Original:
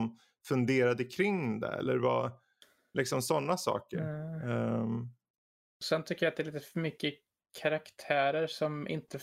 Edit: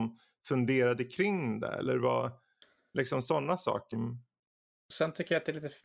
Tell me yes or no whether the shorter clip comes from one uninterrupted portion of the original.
no